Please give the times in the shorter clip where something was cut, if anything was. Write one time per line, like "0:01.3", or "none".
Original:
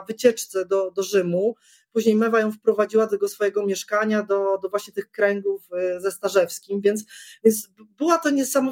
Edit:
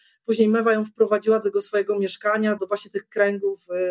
0:02.6